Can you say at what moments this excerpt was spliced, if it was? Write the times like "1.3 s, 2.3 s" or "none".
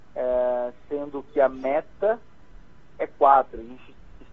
none